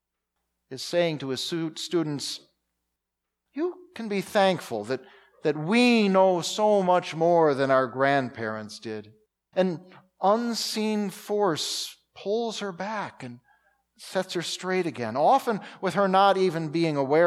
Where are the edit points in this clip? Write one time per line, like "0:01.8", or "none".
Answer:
0:09.5